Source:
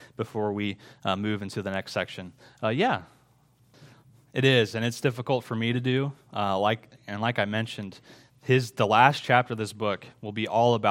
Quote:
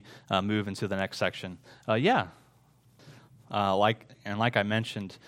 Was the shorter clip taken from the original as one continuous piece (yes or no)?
no